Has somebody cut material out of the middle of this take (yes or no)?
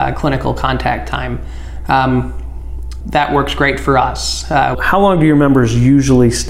yes